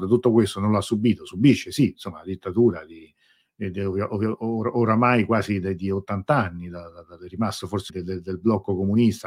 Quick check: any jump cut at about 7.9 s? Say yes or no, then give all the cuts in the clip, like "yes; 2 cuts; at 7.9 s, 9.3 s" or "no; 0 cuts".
yes; 1 cut; at 7.9 s